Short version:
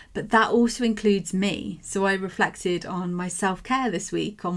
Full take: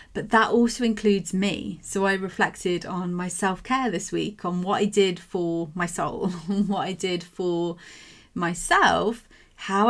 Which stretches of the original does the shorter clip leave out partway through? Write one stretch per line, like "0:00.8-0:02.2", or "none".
none